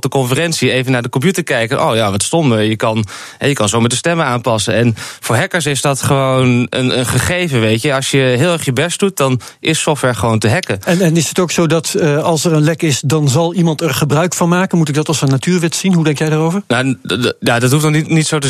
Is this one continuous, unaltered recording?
yes; 0 cuts

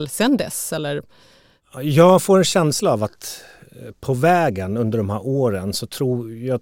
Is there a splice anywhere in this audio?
no; 0 cuts

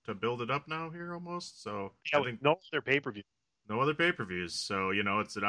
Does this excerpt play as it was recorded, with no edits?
no; 1 cut; at 2.0 s

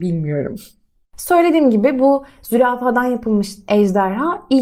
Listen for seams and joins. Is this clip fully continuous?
yes; 0 cuts

